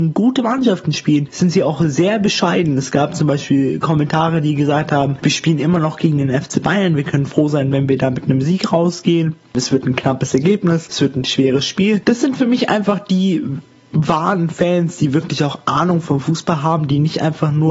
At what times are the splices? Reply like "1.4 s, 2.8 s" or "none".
none